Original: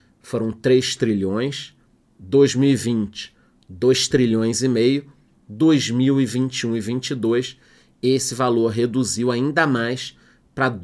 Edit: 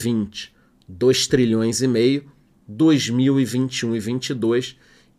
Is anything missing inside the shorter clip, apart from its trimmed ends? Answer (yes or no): no